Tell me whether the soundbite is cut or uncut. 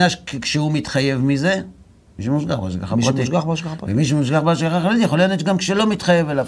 uncut